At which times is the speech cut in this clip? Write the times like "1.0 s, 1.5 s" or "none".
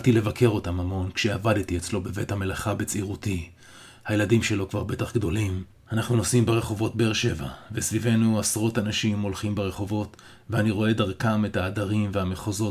5.7 s